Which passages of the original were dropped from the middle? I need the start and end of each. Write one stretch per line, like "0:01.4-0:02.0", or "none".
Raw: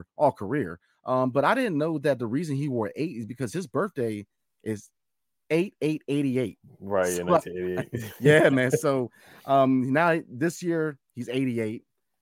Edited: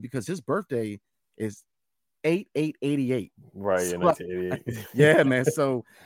none